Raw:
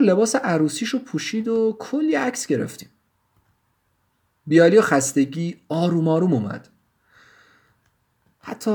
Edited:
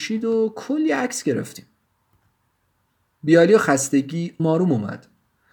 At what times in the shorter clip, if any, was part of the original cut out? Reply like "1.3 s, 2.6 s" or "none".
4.4 s

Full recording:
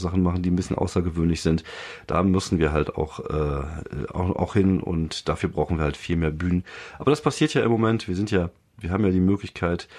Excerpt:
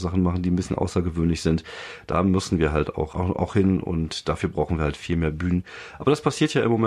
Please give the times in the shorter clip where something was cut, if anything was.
3.1 s

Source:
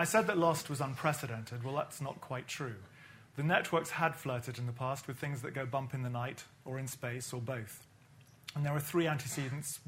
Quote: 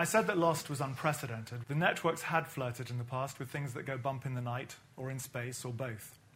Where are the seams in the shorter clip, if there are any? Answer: 1.6 s

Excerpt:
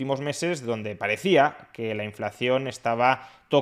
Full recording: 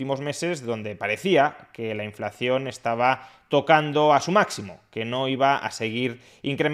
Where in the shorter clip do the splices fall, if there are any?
none

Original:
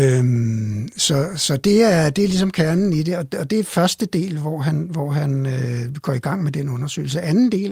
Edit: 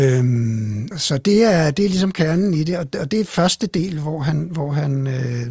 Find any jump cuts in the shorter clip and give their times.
0.9 s

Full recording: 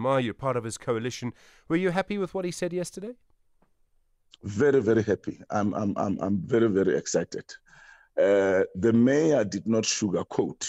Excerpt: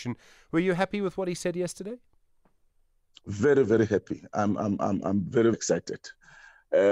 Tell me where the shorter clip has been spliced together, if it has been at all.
5.5 s

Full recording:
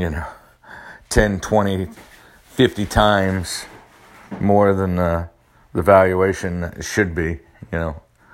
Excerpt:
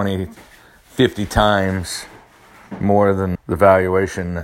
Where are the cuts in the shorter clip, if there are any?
3.4 s

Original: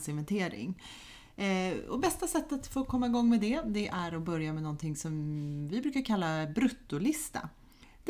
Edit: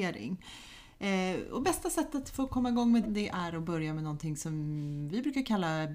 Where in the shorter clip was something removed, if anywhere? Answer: 3.0 s

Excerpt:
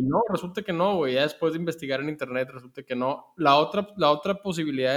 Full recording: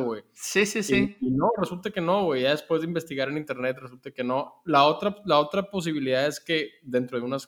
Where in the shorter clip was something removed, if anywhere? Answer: none

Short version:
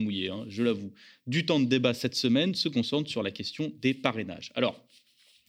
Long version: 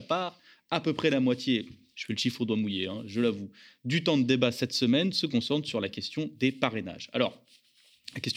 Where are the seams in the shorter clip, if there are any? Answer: none

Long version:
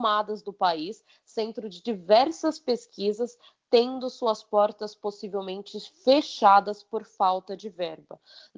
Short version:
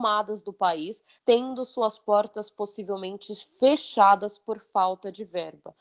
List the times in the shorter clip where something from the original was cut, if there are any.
1.2 s

